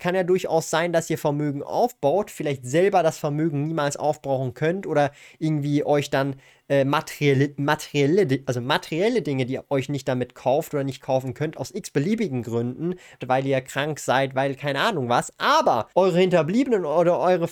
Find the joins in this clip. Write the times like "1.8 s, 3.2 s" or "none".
13.2 s, 15.9 s